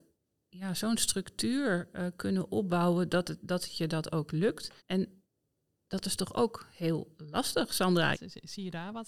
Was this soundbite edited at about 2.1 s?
no; 2 cuts; at 4.8 s, 8.1 s

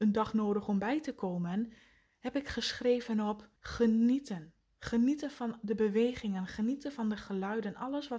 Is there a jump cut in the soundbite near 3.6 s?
yes; 1 cut; at 3.6 s

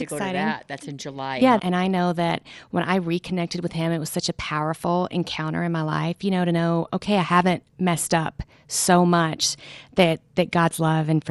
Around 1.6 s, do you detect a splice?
yes; 1 cut; at 1.6 s

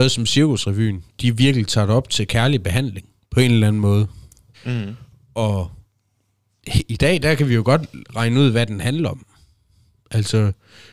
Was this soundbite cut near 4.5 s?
yes; 1 cut; at 4.5 s

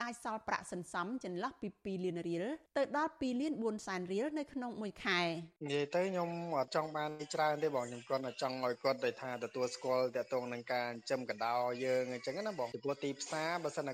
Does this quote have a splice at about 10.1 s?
no; 1 cut; at 5.6 s

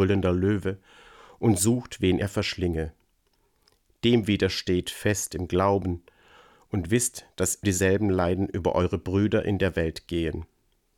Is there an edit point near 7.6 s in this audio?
yes; 1 cut; at 7.6 s

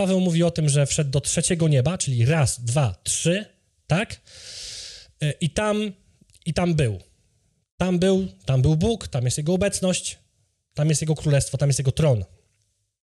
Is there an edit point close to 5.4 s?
no; 0 cuts

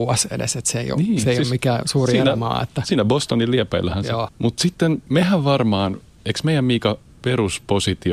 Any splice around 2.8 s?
no; 1 cut; at 4.3 s

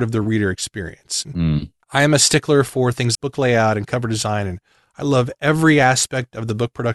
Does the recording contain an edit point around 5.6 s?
no; 2 cuts; at 1.2 s, 3.1 s

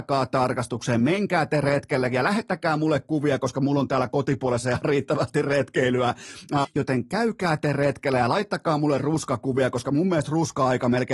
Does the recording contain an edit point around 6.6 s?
yes; 1 cut; at 6.6 s

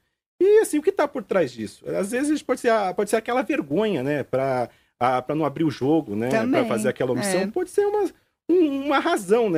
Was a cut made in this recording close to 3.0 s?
no; 0 cuts

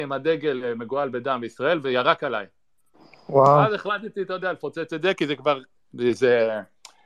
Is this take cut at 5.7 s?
yes; 1 cut; at 5.7 s

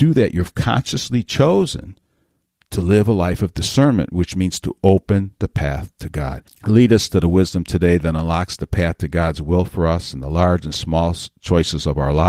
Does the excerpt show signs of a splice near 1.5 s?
no; 1 cut; at 6.5 s

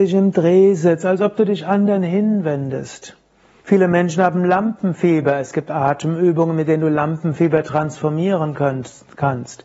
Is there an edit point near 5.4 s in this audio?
no; 1 cut; at 3.6 s

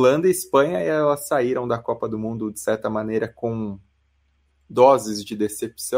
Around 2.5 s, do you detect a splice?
no; 0 cuts

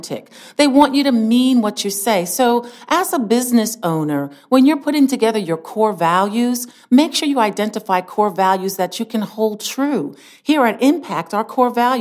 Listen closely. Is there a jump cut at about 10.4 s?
no; 0 cuts

